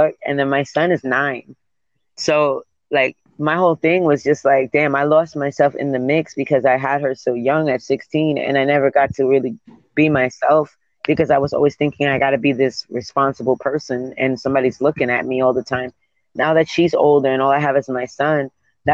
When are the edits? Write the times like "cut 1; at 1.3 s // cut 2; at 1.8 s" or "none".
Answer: none